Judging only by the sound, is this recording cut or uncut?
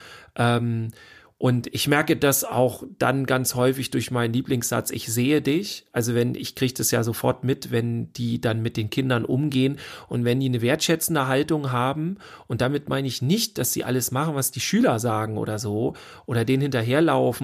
uncut